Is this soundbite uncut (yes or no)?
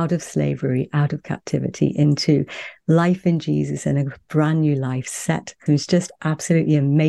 no